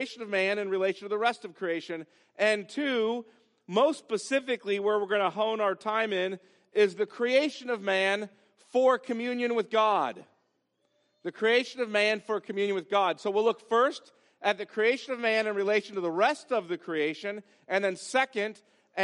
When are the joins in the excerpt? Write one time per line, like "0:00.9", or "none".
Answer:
none